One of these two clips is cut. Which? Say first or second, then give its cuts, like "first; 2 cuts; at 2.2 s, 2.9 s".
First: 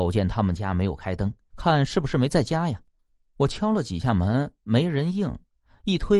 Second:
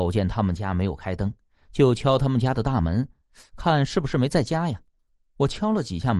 first; 1 cut; at 1.5 s